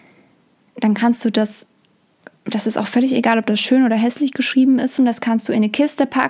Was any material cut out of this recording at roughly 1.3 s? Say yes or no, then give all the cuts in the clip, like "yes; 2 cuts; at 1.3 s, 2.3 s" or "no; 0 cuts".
no; 1 cut; at 5.0 s